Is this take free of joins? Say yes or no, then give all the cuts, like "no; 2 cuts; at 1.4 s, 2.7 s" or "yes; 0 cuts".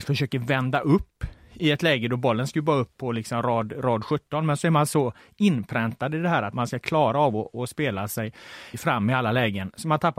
no; 3 cuts; at 3.0 s, 6.5 s, 8.7 s